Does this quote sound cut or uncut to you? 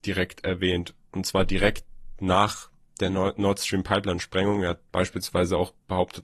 uncut